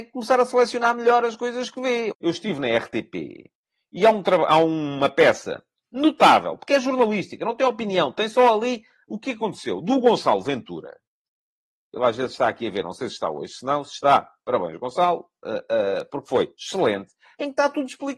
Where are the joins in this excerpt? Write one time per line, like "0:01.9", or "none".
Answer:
0:02.1